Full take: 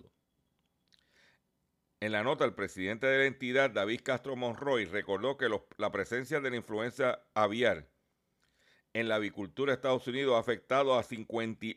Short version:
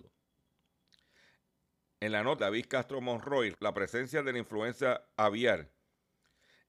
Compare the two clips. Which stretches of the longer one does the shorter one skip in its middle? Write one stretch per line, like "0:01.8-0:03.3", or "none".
0:02.4-0:03.7
0:04.9-0:05.7